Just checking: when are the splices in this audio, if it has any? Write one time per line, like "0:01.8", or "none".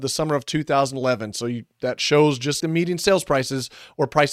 0:02.6